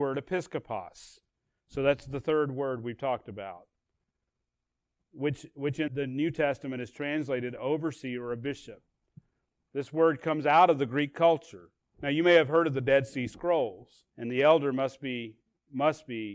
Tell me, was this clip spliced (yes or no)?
yes